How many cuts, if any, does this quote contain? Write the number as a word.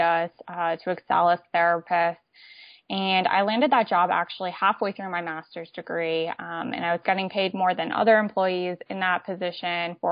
zero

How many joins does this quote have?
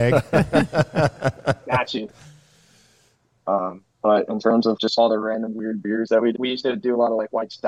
three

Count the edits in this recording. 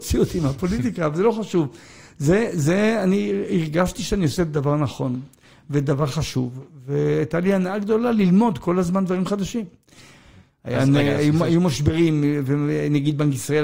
zero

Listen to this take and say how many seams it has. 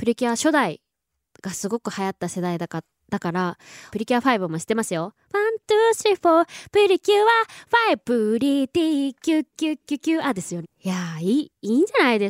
two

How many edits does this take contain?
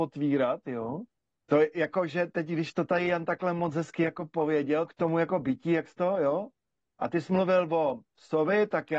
two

